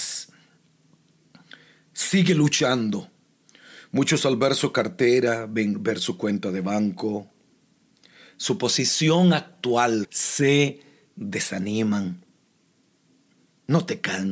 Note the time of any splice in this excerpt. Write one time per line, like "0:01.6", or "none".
0:10.0